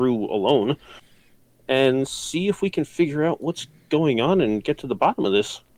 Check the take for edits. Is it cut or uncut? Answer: uncut